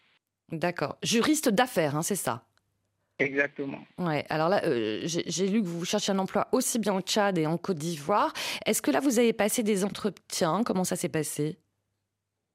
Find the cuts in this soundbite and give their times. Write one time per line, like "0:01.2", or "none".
none